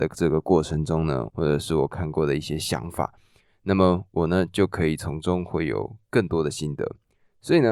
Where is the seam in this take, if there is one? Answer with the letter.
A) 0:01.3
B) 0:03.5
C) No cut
A